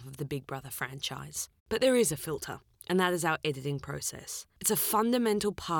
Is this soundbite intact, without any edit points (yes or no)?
no